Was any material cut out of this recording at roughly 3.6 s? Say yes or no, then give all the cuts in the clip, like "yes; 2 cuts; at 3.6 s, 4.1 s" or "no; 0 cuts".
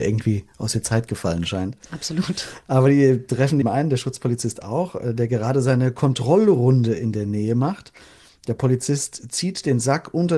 yes; 1 cut; at 3.6 s